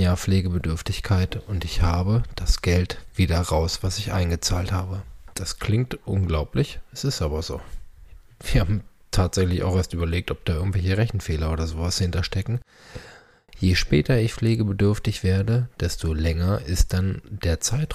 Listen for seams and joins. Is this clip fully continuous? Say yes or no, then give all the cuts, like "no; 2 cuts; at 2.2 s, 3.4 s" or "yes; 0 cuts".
no; 1 cut; at 5.3 s